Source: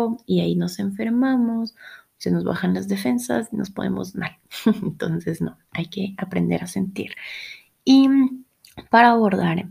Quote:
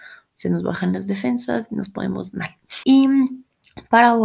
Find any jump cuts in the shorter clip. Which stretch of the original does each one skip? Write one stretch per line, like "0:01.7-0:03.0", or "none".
0:04.6-0:07.8